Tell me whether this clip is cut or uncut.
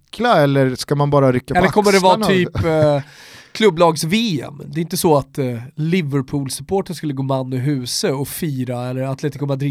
uncut